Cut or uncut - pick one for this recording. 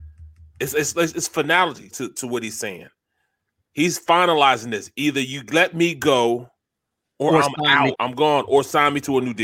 cut